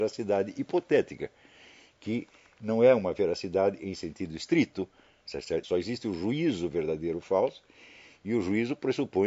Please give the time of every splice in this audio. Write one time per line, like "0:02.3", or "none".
0:05.6